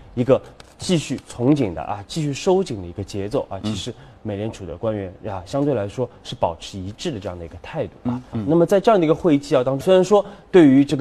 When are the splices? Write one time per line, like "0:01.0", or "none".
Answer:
0:02.0
0:08.3
0:09.8